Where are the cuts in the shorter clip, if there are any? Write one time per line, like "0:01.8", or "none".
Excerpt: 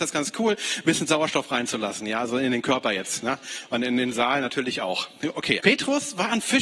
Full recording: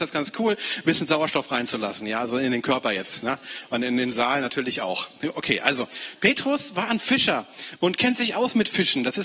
0:05.6